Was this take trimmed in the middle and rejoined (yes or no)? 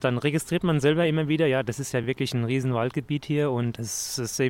no